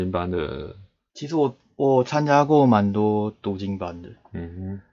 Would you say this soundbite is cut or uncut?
cut